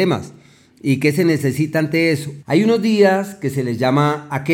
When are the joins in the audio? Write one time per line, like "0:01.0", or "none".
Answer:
0:02.4